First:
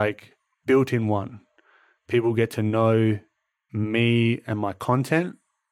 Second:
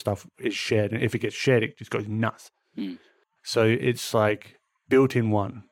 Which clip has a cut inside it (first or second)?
second